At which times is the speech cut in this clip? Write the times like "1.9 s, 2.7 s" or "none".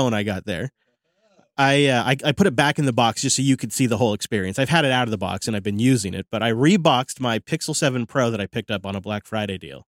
none

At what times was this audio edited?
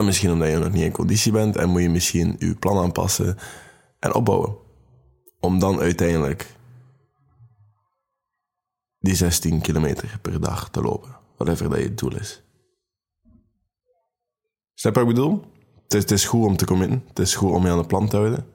none

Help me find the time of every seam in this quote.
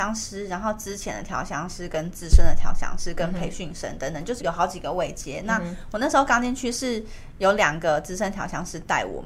4.4 s

